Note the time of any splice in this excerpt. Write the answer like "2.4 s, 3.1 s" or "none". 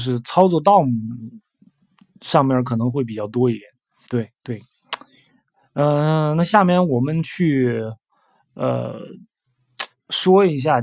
4.1 s